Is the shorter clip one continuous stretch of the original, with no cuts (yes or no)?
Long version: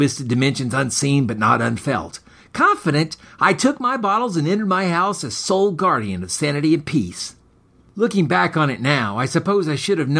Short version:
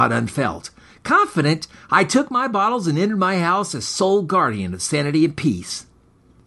yes